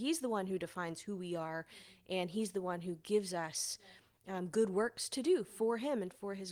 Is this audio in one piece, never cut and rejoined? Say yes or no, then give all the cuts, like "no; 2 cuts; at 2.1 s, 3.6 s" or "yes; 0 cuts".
yes; 0 cuts